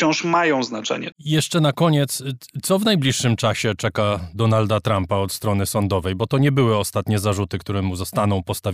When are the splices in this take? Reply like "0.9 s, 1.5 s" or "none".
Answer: 1.1 s